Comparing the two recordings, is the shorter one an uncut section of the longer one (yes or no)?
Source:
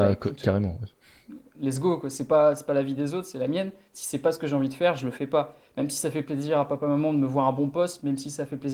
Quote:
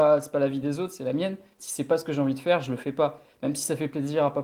yes